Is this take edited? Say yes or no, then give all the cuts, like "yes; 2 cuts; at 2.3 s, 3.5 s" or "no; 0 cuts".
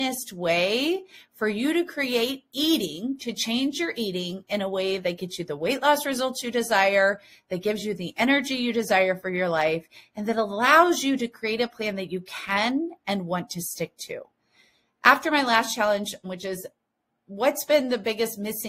yes; 1 cut; at 16.2 s